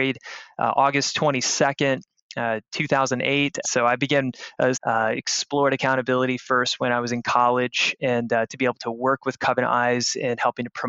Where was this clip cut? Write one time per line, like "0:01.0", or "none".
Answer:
0:03.6
0:04.7